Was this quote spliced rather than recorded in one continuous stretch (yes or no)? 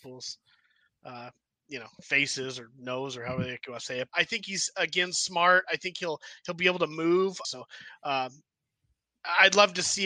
yes